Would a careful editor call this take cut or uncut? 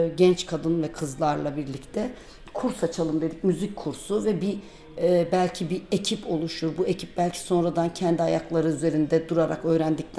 uncut